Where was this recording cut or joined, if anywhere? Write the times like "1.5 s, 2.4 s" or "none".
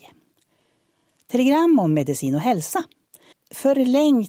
3.3 s